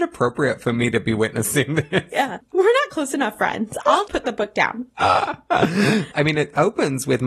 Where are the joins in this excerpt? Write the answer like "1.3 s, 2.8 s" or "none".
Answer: 4.1 s, 6.1 s